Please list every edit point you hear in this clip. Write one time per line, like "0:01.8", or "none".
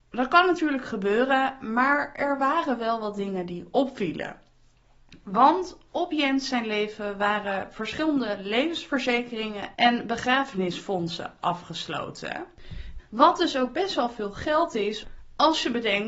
0:13.0